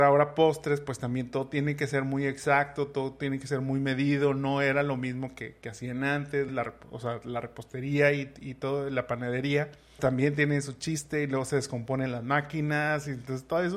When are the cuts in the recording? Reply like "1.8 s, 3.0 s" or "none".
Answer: 6.5 s, 10.0 s

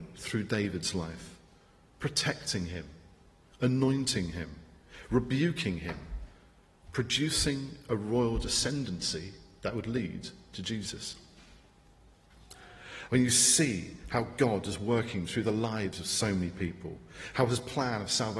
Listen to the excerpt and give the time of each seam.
13.1 s

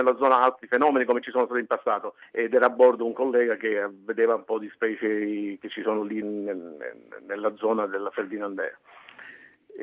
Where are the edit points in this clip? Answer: 2.2 s, 6.2 s

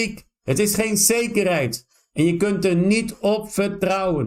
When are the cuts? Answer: none

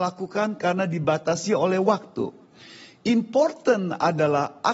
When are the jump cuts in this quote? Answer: none

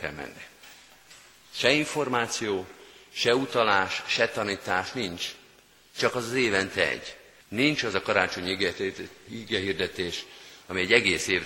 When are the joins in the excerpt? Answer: 7.4 s

